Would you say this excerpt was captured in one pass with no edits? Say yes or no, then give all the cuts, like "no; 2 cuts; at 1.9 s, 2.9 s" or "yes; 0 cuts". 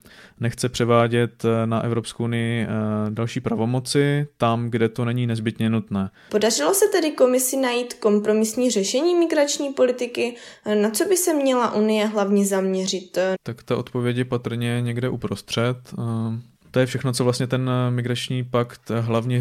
no; 3 cuts; at 6.3 s, 13.3 s, 16.5 s